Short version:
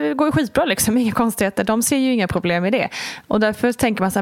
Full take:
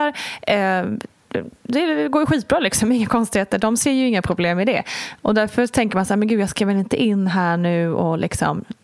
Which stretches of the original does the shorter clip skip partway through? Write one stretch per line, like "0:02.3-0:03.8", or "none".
none